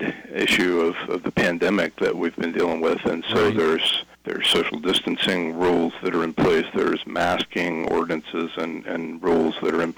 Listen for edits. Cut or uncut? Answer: cut